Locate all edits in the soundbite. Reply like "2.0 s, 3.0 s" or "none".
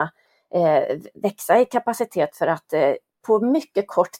none